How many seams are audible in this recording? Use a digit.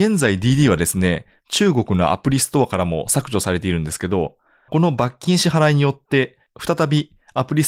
0